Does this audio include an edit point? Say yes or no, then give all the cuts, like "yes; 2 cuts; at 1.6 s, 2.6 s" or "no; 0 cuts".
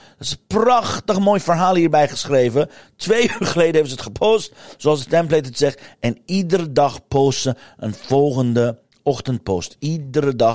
no; 0 cuts